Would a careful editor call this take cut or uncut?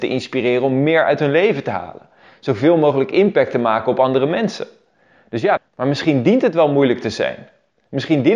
cut